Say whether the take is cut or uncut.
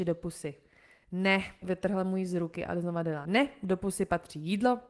cut